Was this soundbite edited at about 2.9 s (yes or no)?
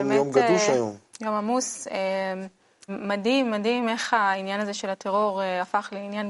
yes